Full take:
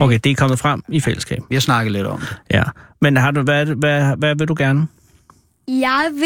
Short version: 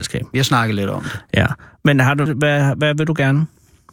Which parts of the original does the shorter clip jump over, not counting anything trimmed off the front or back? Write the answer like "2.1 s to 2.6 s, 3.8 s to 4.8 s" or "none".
3.4 s to 3.7 s